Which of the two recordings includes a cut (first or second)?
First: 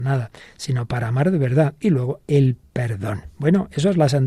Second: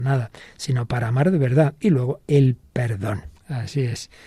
second